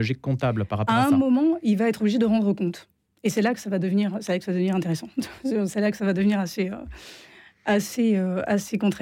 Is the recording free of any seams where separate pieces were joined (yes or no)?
yes